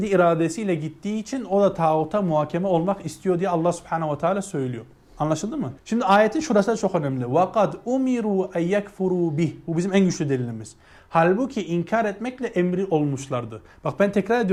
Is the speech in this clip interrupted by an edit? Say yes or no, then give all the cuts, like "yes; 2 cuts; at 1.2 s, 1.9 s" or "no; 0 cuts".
yes; 1 cut; at 5.8 s